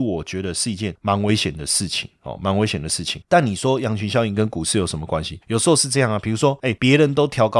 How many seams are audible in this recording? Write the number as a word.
zero